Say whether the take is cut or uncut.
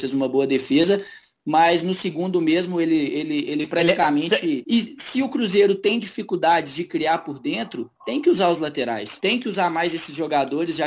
cut